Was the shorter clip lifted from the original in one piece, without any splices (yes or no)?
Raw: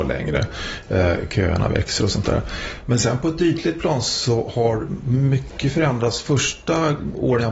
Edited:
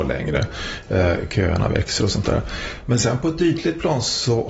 yes